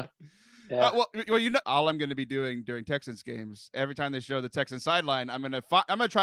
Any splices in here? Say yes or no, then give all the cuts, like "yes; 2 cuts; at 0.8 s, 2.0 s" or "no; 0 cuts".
yes; 1 cut; at 1.6 s